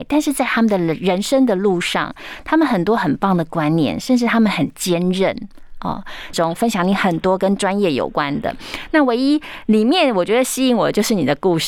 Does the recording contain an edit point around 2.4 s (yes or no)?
no